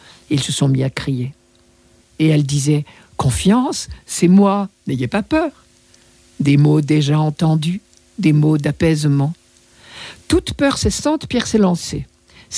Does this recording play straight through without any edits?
no; 1 cut; at 2.0 s

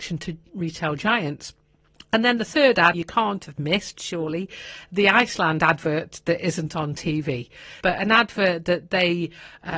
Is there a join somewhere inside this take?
yes; 2 cuts; at 2.9 s, 7.8 s

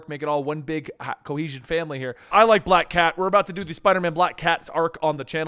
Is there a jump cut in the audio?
yes; 1 cut; at 2.3 s

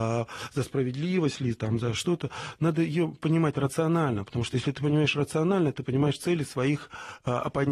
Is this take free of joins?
yes; 0 cuts

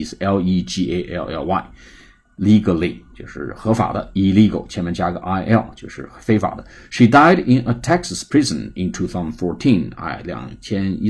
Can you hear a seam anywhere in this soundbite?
no; 0 cuts

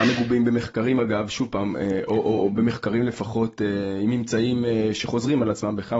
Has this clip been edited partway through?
no; 0 cuts

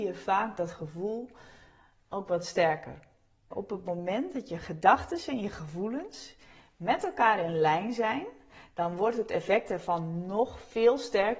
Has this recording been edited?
yes; 1 cut; at 3.5 s

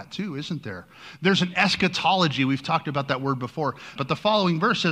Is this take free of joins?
no; 1 cut; at 4.0 s

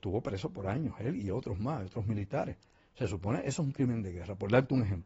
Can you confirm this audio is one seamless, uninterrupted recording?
yes; 0 cuts

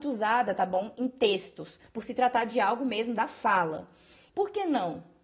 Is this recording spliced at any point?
yes; 2 cuts; at 1.9 s, 4.3 s

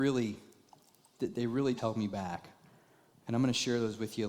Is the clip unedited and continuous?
no; 1 cut; at 1.8 s

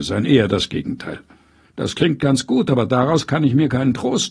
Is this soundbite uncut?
no; 1 cut; at 1.6 s

